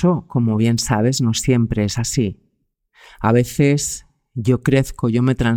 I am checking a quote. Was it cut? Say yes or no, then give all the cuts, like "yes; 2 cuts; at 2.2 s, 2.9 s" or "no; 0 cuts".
no; 0 cuts